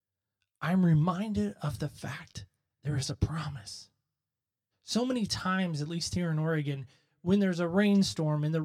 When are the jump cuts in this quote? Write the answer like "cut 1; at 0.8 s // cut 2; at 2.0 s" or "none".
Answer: cut 1; at 4.7 s